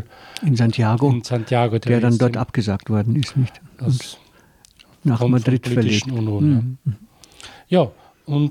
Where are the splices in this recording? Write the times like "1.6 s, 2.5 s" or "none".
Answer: none